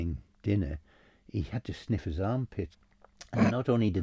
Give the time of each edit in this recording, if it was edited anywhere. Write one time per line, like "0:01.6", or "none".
0:02.7